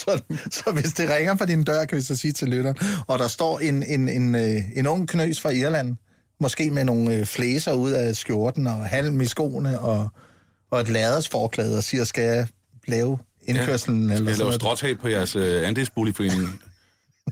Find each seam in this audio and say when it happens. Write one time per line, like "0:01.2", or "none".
none